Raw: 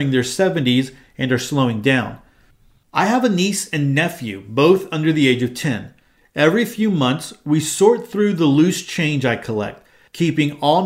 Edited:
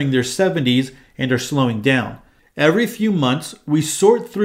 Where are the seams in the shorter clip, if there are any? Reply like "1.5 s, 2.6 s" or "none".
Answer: 2.4 s